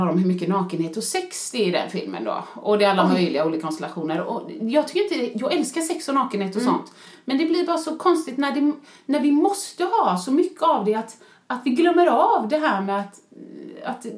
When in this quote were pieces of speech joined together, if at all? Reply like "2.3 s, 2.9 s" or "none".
none